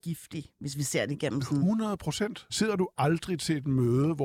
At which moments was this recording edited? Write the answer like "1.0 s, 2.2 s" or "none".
2.5 s